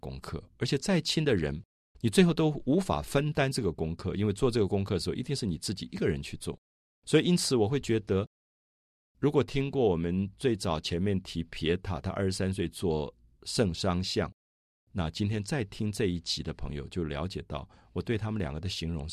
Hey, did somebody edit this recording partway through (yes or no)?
yes